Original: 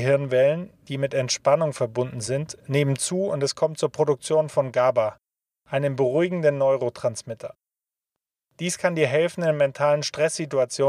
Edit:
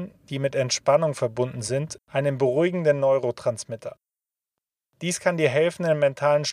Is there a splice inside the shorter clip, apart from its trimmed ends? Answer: yes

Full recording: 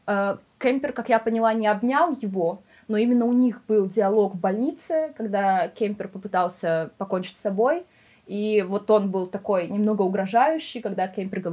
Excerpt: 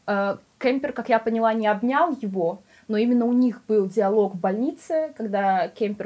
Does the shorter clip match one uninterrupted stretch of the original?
yes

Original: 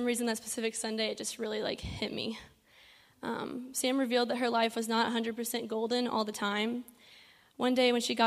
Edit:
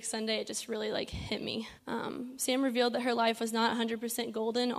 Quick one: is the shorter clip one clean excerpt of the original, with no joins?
no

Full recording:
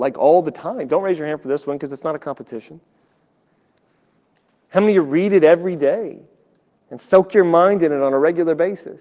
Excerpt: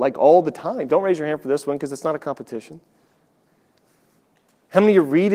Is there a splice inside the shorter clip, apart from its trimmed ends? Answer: no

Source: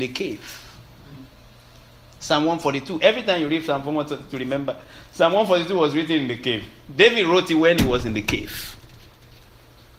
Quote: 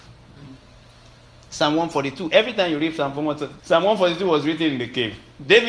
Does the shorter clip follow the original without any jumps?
no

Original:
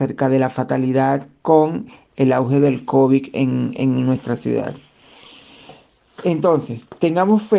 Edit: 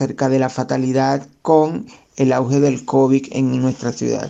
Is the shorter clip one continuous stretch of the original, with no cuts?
no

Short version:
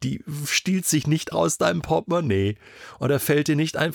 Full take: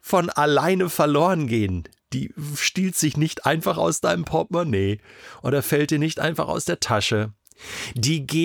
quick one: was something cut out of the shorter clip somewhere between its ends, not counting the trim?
yes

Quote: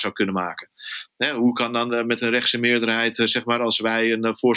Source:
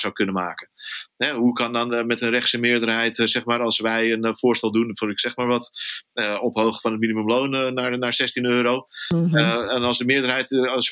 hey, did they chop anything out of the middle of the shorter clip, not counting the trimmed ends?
no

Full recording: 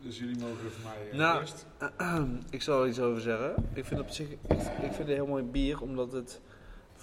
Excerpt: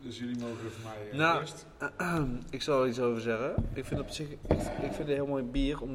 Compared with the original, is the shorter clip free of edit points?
yes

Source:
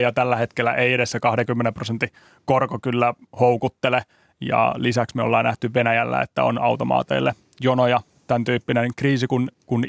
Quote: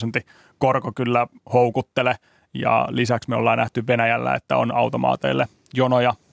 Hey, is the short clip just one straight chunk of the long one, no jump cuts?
yes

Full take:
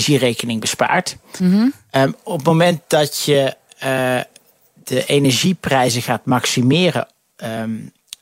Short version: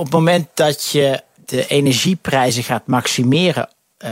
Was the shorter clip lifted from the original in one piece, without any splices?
no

